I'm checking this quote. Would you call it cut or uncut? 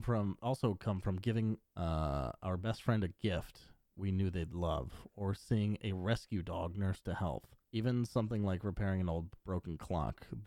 cut